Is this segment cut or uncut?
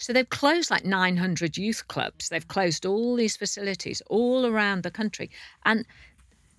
uncut